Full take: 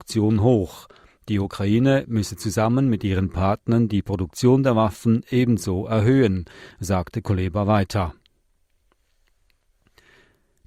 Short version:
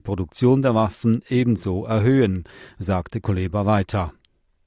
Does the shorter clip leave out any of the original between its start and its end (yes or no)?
no